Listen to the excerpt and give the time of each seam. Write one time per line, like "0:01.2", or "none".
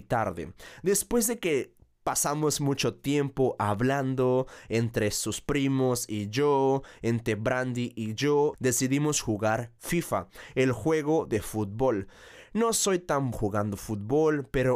0:08.5
0:13.3